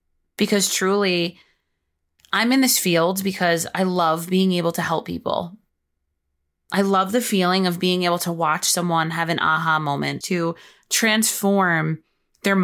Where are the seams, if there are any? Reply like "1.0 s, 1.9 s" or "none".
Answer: 10.2 s